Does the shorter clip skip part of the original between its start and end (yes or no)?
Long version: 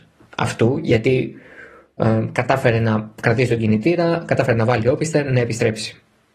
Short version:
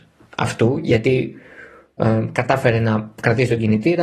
no